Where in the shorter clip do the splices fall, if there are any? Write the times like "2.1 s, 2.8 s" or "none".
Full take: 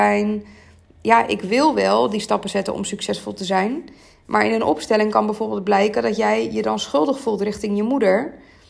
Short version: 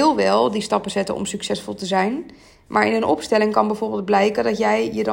none